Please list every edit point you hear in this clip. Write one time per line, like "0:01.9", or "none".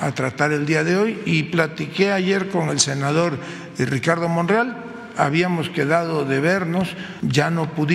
none